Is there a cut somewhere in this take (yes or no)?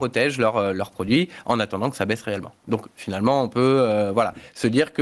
no